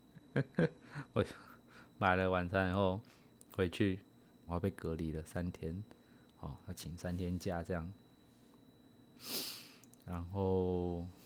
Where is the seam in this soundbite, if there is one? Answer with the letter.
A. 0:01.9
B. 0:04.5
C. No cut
B